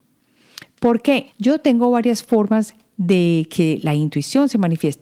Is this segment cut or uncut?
cut